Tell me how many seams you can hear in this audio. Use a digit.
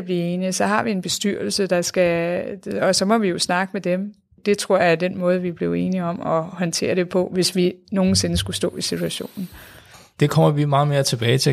0